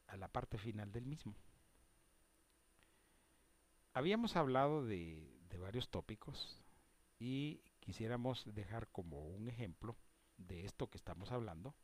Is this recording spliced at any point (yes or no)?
no